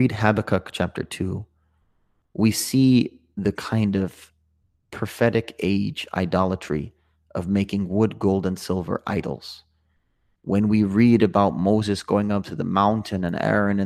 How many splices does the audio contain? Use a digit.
0